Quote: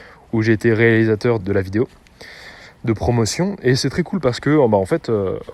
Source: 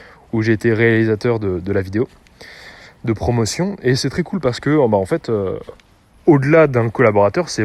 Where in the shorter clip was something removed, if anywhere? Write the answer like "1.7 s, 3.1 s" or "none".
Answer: 1.4 s